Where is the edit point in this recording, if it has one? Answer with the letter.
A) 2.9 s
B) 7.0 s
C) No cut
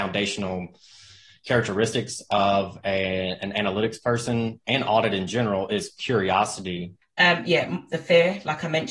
B